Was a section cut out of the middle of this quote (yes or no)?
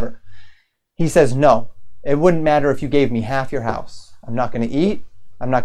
no